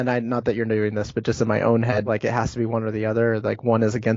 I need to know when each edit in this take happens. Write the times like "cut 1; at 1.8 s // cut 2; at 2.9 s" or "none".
cut 1; at 2.1 s